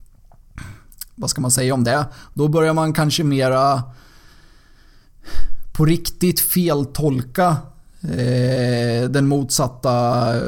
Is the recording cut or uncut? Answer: uncut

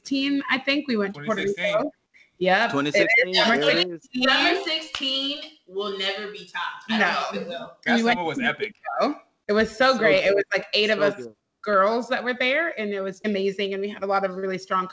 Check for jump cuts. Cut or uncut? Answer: cut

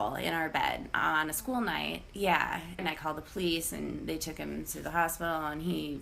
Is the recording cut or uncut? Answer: cut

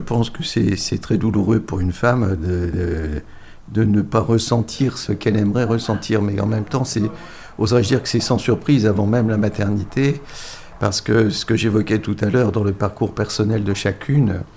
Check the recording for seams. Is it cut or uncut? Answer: uncut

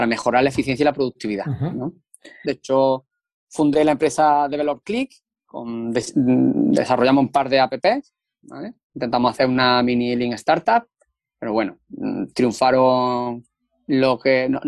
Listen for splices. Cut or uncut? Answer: cut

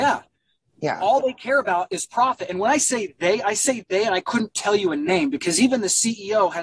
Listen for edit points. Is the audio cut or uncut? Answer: uncut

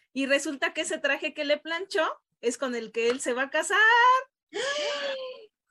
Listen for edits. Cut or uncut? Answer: uncut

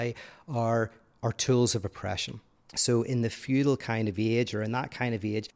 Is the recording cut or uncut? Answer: cut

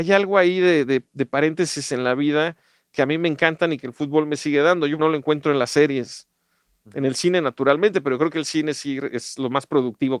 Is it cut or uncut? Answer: cut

